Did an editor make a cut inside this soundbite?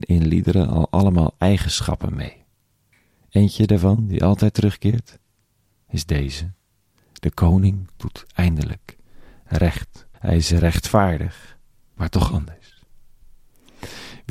yes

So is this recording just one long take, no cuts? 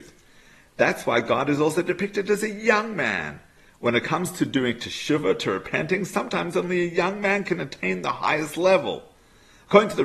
yes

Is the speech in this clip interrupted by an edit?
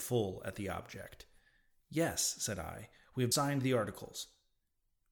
yes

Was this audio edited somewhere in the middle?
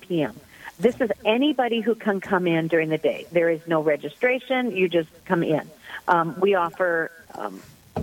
no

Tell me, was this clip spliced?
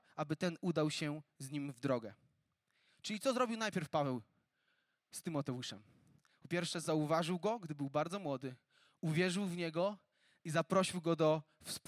no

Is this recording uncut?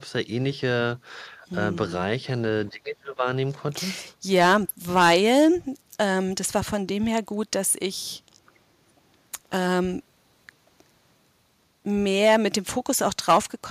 yes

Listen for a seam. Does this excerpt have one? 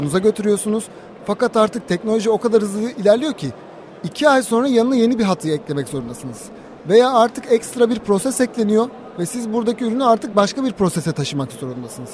no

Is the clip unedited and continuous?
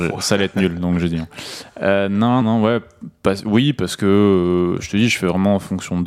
no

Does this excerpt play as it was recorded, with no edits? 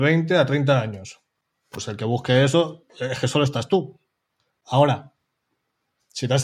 yes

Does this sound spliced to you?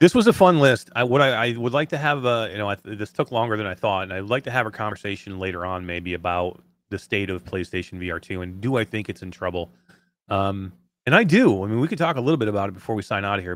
no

